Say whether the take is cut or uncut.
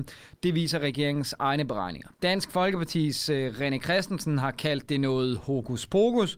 cut